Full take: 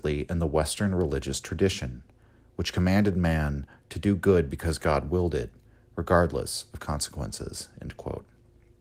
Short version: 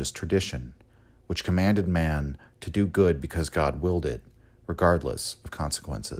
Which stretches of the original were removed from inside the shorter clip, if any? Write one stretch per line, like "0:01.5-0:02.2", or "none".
none